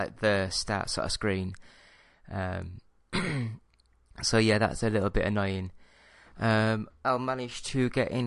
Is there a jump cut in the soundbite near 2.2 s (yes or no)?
no